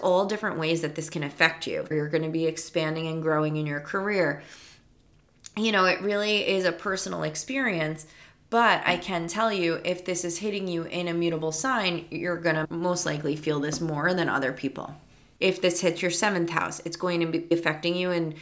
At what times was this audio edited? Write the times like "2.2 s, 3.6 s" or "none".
1.9 s, 15.4 s